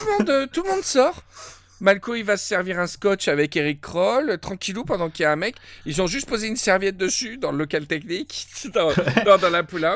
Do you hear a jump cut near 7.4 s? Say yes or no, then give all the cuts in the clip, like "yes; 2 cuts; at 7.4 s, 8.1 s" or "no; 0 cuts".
no; 0 cuts